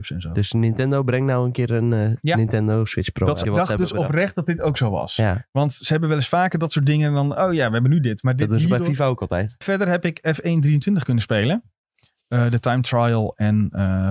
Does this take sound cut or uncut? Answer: cut